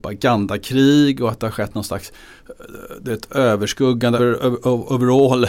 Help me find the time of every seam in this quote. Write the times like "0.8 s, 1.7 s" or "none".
4.2 s